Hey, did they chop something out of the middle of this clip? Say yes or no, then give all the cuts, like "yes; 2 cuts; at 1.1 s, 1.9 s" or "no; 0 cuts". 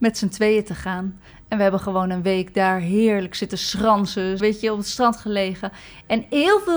yes; 2 cuts; at 1.3 s, 4.4 s